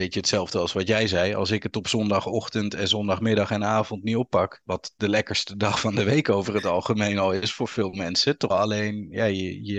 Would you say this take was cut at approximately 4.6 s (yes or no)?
yes